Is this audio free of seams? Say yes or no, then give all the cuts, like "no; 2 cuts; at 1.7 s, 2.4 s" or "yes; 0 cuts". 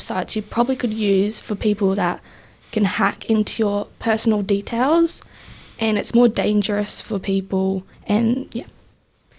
no; 1 cut; at 7.9 s